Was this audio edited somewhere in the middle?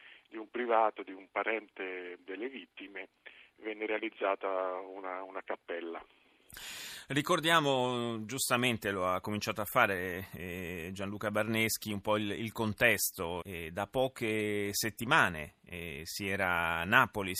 yes; 1 cut; at 13.4 s

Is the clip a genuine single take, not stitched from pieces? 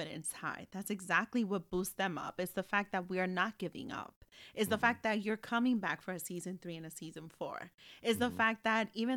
yes; 0 cuts

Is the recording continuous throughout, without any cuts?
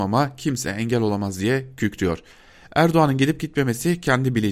yes; 0 cuts

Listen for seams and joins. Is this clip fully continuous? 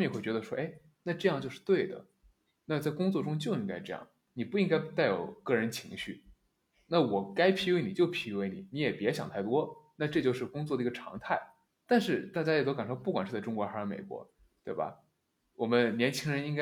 yes; 0 cuts

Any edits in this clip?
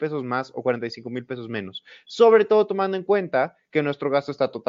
no; 0 cuts

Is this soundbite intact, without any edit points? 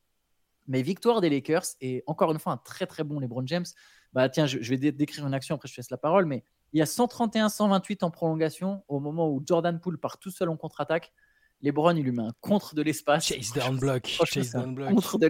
yes; 0 cuts

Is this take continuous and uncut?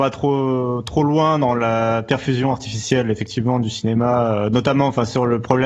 yes; 0 cuts

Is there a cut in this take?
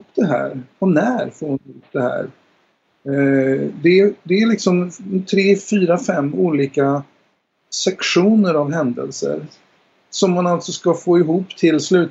no; 0 cuts

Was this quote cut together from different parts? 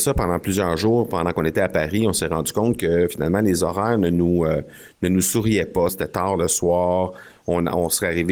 yes; 1 cut; at 5.9 s

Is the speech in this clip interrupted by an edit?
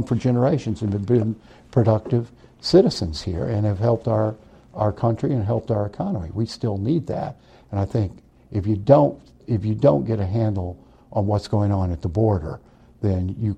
no; 0 cuts

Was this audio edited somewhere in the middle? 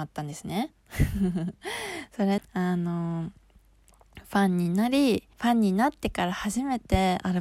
yes; 2 cuts; at 2.4 s, 5.3 s

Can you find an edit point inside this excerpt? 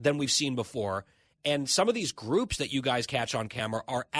no; 0 cuts

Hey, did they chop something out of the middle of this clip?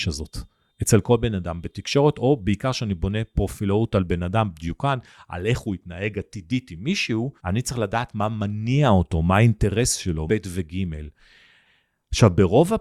yes; 2 cuts; at 7.4 s, 10.3 s

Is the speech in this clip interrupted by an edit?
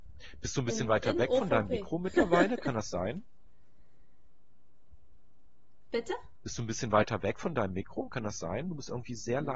no; 0 cuts

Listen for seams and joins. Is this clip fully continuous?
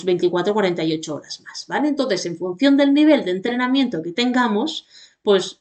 yes; 0 cuts

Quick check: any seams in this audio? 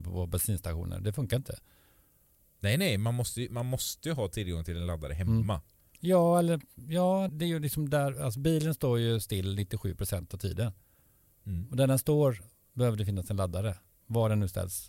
yes; 1 cut; at 7.3 s

